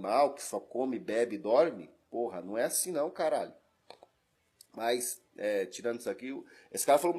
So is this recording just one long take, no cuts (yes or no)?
yes